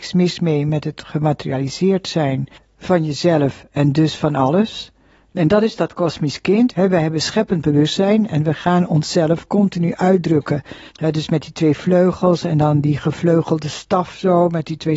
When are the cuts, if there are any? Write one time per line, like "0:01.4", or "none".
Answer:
0:05.3
0:06.7
0:10.9

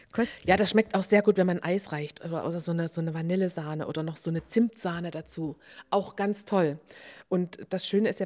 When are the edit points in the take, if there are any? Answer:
none

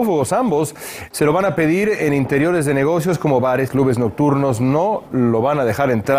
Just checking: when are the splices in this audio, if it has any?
0:01.1
0:03.7

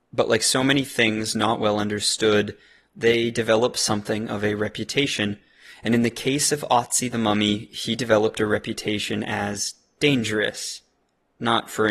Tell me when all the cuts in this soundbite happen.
none

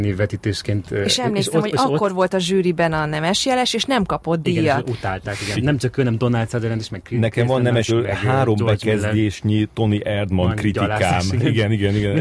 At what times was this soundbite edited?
0:05.5
0:07.9

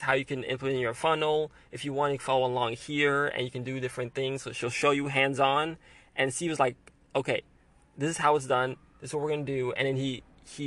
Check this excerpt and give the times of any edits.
none

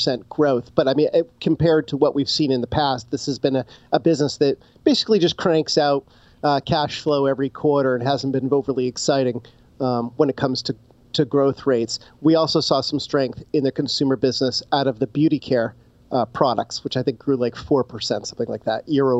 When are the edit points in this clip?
none

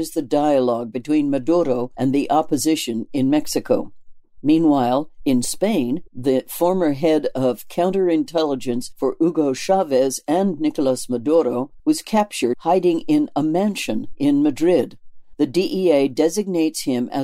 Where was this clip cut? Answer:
0:06.1
0:11.8

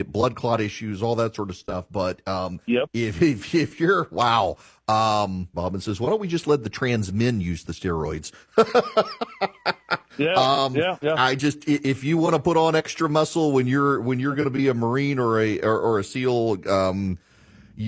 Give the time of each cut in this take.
0:05.5
0:11.0

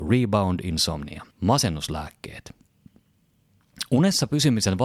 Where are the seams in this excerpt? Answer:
0:01.3

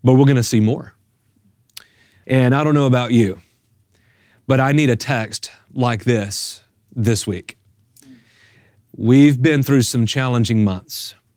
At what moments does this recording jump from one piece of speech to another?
0:02.2

